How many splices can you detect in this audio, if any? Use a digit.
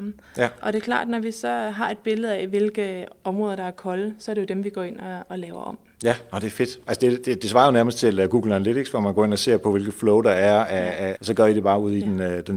1